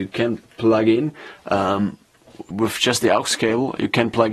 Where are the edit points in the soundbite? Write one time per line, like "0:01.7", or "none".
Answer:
0:02.5